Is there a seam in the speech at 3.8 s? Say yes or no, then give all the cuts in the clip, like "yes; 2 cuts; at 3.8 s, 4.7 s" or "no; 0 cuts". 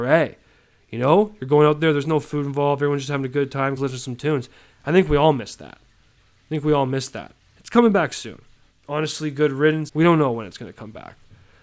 yes; 3 cuts; at 3.8 s, 8.7 s, 9.9 s